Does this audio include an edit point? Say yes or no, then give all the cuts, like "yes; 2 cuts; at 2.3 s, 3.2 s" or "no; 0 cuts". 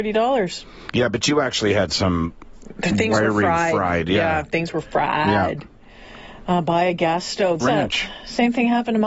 yes; 1 cut; at 7.6 s